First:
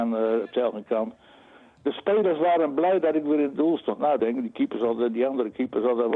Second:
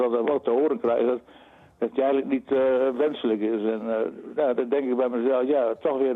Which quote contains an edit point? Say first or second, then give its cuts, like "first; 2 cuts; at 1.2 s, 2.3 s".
first; 1 cut; at 4.2 s